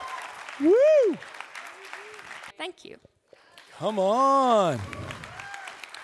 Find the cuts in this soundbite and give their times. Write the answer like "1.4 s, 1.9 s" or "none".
2.5 s